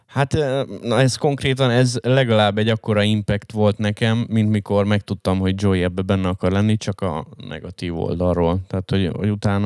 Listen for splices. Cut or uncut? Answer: uncut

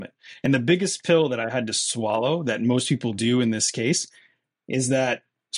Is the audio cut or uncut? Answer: uncut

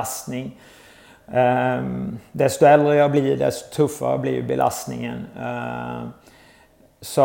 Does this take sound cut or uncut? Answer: uncut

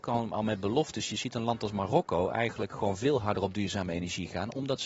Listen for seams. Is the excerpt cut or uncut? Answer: uncut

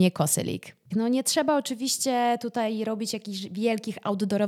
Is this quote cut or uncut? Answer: cut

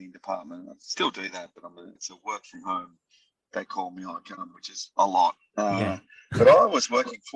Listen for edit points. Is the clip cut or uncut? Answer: cut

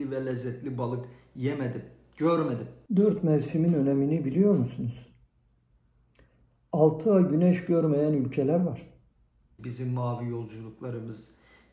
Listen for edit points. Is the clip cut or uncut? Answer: cut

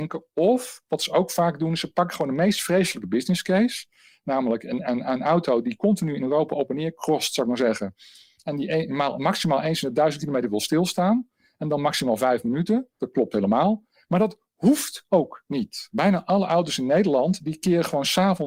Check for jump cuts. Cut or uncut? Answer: cut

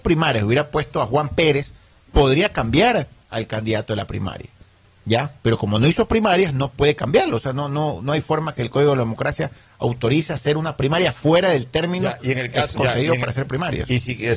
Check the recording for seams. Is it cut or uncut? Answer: cut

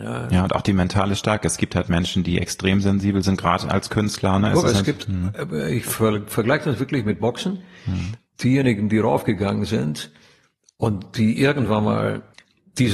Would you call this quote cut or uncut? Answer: uncut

